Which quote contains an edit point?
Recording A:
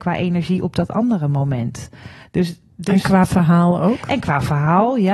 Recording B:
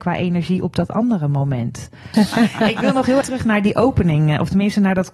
B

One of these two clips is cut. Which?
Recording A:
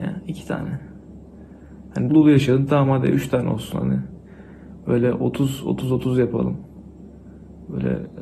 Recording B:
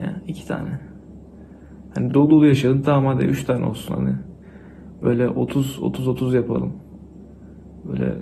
A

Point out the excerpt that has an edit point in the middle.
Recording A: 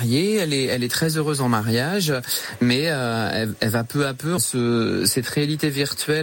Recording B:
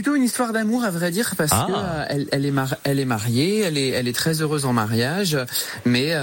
A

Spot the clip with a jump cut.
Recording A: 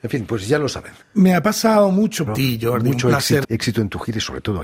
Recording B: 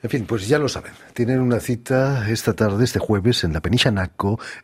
A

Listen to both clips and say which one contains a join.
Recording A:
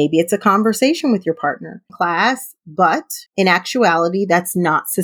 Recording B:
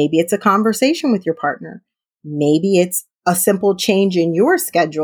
A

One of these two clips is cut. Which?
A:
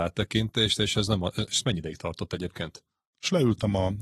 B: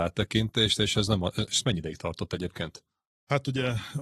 A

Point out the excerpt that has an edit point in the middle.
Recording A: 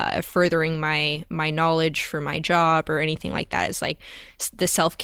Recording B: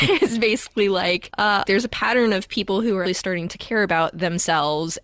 B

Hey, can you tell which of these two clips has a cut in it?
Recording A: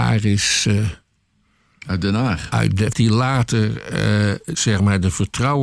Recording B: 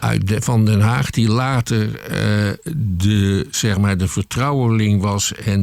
A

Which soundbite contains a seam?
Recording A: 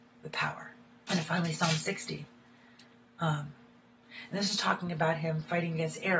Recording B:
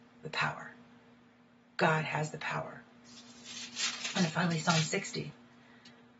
A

